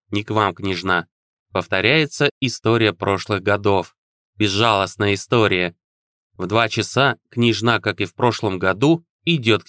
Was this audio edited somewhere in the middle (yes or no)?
no